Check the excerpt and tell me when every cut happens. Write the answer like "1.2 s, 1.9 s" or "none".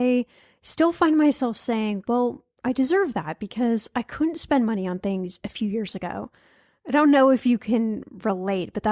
none